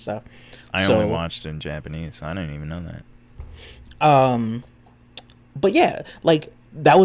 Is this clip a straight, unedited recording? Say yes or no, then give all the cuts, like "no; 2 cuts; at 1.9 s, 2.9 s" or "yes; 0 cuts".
yes; 0 cuts